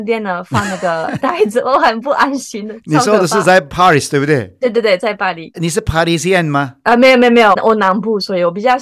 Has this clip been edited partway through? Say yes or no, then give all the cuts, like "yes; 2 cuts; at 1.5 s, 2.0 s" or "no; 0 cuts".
no; 0 cuts